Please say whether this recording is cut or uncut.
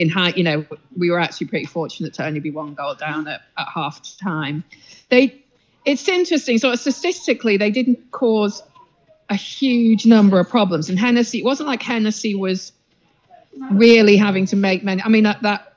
uncut